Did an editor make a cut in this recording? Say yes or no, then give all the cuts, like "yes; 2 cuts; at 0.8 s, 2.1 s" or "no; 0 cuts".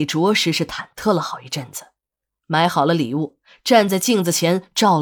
no; 0 cuts